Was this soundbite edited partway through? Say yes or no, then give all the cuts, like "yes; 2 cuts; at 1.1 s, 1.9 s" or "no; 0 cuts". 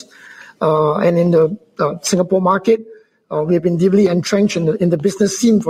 no; 0 cuts